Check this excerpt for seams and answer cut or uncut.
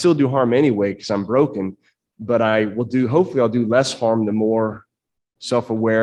uncut